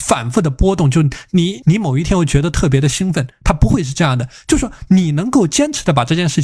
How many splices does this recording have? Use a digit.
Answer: 1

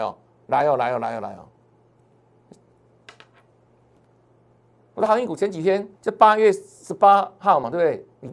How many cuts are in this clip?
1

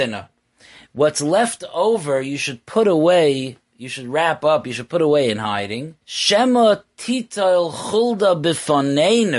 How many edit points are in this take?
1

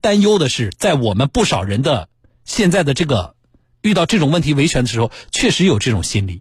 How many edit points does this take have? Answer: 1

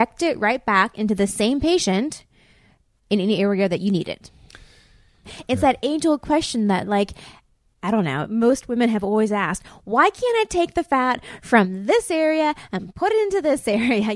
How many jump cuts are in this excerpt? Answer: 1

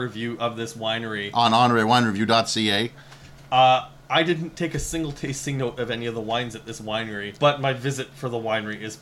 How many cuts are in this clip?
1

